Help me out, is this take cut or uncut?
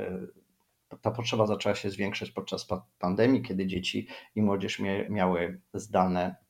cut